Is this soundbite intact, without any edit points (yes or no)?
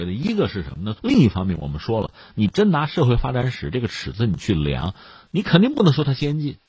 no